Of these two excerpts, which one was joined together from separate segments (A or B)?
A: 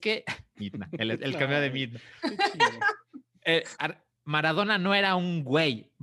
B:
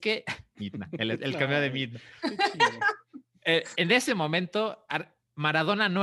A